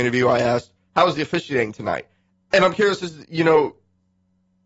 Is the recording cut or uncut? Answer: cut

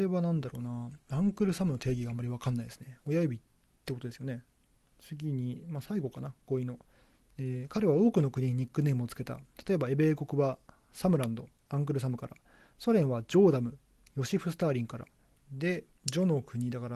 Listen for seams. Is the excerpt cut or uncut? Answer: cut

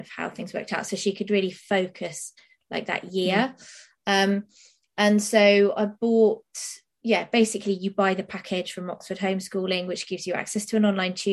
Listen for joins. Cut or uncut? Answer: uncut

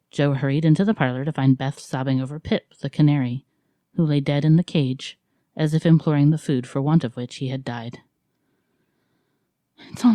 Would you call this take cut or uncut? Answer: cut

